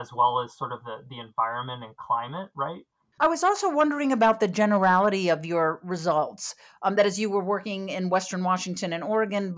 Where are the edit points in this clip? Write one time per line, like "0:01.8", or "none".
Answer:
0:03.0